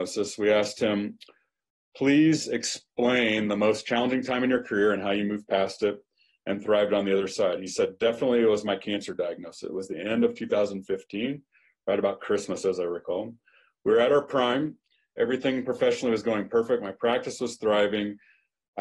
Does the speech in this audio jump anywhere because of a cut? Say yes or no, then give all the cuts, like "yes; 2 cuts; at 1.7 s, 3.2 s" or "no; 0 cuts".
no; 0 cuts